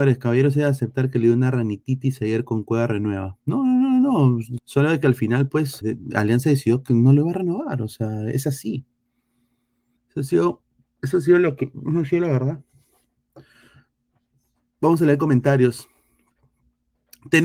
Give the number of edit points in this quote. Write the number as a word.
three